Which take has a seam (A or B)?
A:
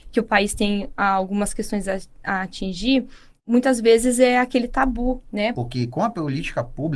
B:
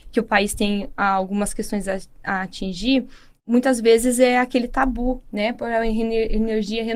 A